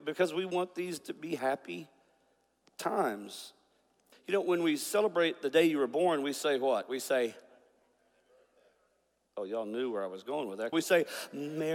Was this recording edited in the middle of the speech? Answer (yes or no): yes